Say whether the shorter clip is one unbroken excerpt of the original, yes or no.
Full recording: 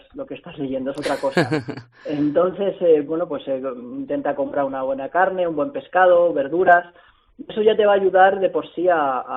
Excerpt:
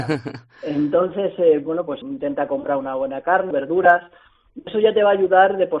no